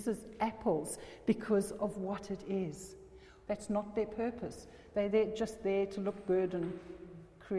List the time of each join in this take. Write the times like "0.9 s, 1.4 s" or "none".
3.5 s